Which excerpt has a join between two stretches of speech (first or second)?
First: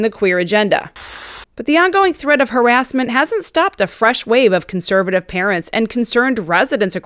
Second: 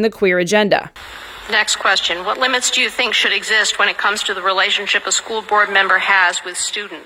first